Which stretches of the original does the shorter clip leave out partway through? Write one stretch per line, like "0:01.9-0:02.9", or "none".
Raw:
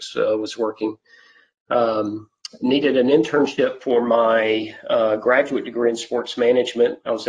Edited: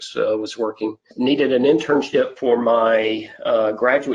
0:01.1-0:02.5